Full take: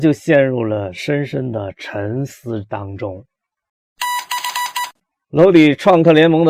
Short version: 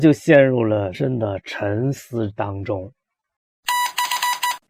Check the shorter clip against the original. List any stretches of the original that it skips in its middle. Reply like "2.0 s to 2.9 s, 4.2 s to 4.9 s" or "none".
0.9 s to 1.3 s